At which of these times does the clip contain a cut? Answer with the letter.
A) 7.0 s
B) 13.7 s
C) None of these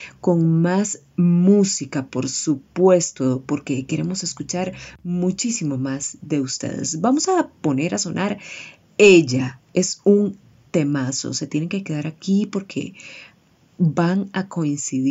C